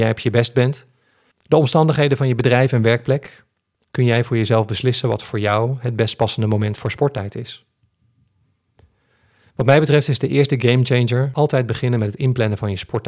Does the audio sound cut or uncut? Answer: uncut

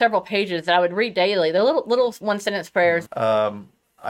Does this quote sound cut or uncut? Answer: cut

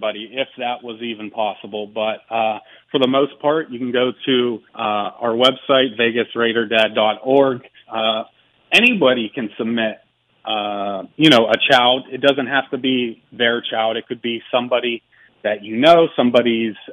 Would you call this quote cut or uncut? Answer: cut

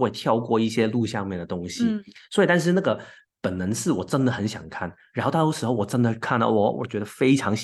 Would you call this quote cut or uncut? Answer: uncut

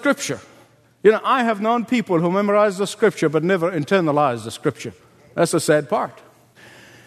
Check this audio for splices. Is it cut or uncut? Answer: uncut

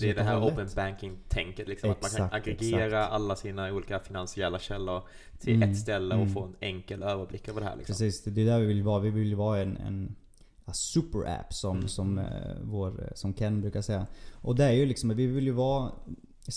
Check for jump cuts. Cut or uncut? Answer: cut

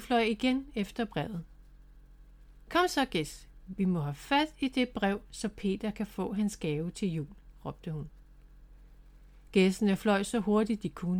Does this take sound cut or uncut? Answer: uncut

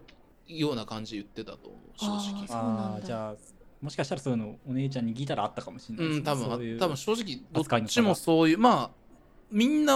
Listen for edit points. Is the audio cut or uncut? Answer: uncut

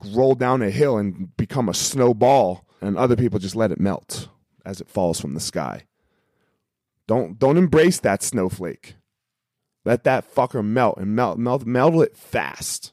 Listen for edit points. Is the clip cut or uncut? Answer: cut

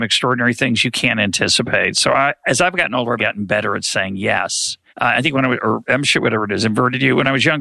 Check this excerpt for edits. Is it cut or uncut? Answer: cut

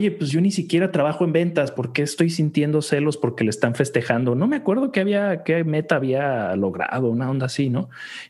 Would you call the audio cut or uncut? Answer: uncut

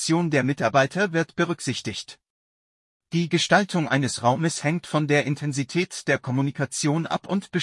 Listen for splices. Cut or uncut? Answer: uncut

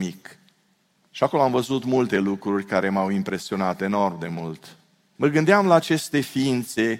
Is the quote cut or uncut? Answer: cut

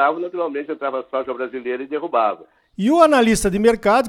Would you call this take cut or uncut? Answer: cut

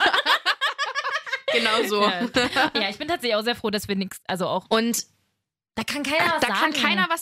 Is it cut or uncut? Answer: cut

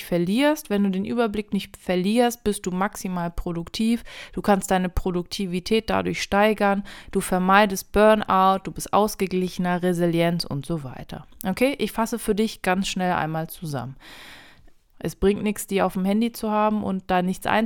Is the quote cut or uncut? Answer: cut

